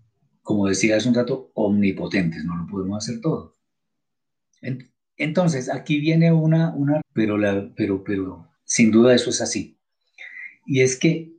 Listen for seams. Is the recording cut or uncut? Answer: cut